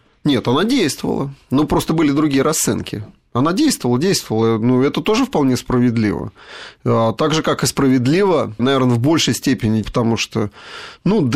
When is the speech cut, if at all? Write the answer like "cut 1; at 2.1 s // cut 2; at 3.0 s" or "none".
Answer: cut 1; at 8.6 s // cut 2; at 9.8 s